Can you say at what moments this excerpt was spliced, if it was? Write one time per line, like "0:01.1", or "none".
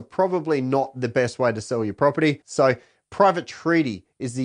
0:02.4